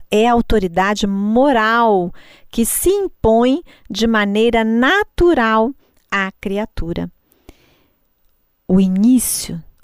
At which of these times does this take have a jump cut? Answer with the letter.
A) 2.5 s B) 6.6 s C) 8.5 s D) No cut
D